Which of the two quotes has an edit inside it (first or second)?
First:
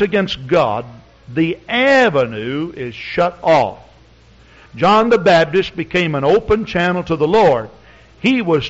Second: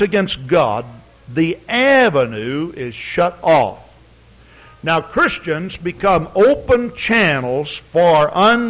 first